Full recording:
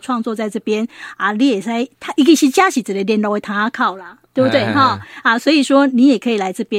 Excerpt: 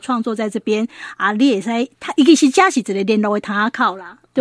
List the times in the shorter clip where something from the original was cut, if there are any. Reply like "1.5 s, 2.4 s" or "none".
none

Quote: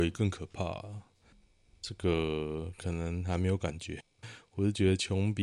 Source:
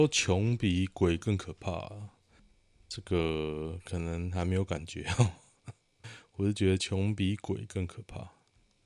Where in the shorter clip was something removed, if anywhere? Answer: 4.0 s

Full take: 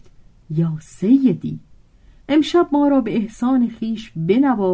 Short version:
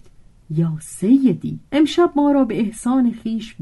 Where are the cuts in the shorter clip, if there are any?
1.7 s

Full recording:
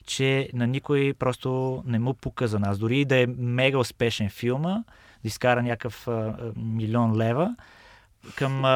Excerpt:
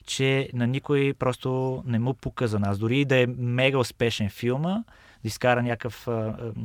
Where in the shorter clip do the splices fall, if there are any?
none

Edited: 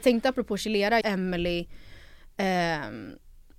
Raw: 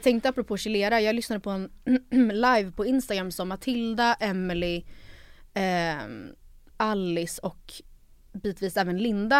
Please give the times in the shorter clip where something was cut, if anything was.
1.0 s

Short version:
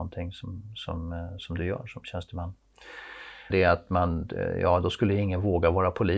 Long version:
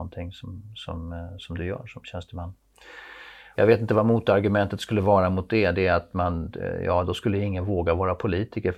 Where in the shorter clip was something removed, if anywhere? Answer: 3.5 s

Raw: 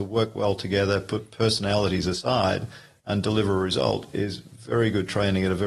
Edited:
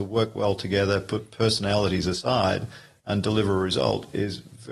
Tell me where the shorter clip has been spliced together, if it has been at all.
none

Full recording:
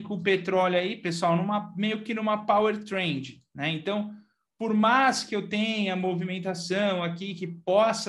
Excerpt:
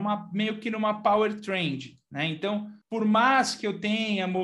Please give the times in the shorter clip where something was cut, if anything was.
2.8 s

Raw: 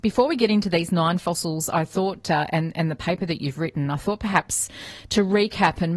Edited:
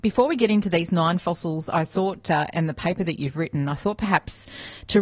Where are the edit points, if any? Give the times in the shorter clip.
2.5 s

